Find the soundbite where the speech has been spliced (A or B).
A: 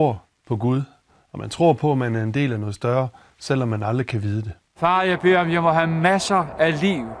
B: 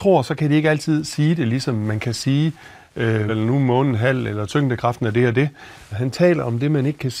B